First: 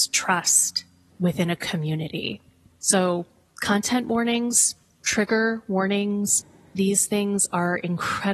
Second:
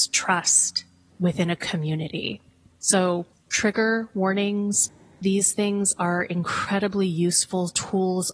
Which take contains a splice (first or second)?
second